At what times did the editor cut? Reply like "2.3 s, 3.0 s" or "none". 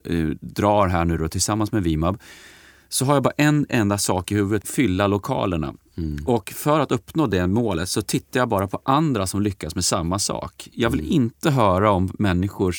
4.6 s